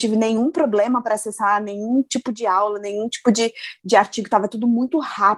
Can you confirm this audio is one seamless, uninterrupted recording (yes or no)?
yes